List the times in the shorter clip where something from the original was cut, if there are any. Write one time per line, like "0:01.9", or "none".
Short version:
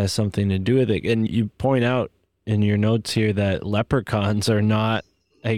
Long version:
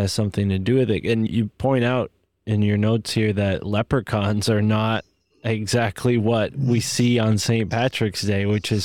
none